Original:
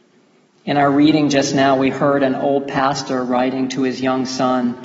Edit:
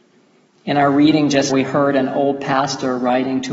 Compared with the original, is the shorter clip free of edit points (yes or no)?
no